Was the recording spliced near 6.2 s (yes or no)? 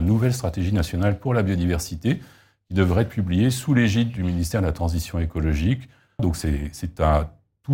yes